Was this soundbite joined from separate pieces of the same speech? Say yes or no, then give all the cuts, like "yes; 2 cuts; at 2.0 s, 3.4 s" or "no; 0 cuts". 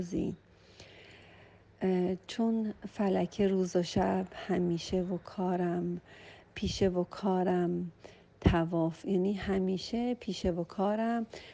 no; 0 cuts